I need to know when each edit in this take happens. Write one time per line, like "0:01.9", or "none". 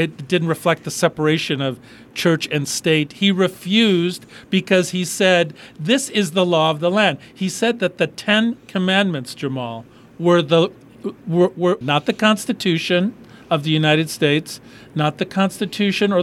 0:11.8